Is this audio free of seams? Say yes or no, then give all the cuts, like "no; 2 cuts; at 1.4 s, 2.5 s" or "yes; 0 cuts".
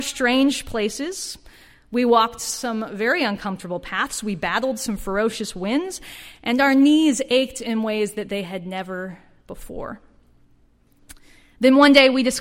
yes; 0 cuts